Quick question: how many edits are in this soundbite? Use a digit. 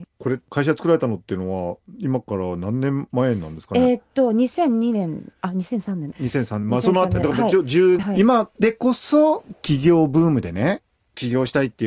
1